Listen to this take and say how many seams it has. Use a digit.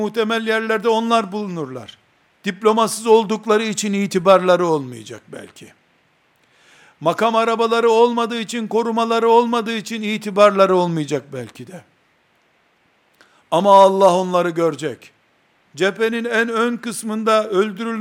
2